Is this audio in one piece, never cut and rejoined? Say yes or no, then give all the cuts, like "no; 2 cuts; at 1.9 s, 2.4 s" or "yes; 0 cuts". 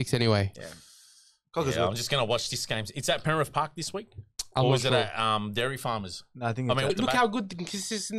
no; 1 cut; at 6.9 s